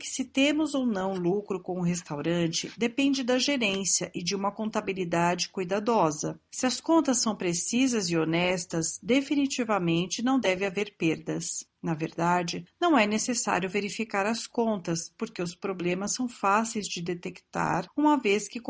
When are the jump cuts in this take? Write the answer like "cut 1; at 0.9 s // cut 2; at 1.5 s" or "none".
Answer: none